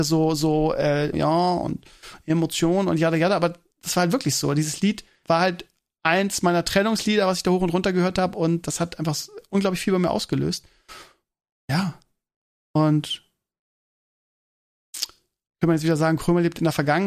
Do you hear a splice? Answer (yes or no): yes